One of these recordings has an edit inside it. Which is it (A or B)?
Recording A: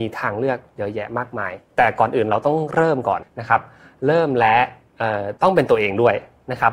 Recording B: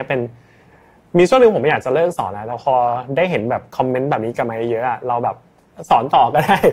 A